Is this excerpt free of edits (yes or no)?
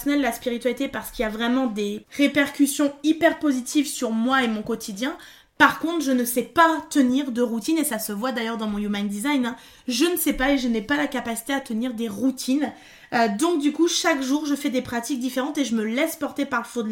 yes